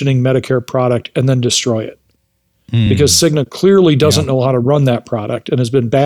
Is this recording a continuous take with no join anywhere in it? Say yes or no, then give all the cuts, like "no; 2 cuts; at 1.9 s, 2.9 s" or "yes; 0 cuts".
yes; 0 cuts